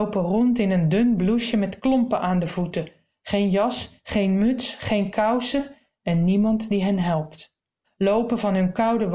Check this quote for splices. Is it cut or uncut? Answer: cut